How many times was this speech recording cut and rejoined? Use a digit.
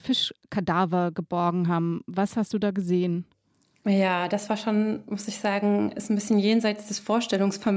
0